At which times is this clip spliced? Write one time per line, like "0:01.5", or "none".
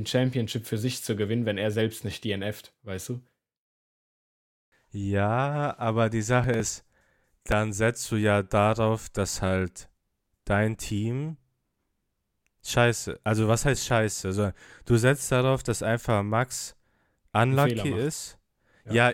none